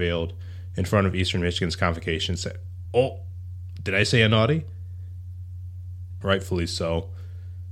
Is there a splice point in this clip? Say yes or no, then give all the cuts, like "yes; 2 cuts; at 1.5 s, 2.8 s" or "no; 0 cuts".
yes; 2 cuts; at 2.8 s, 6.2 s